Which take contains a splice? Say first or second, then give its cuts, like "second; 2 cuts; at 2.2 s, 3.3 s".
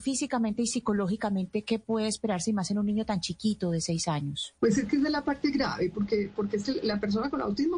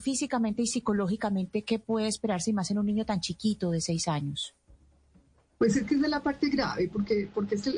first; 1 cut; at 4.6 s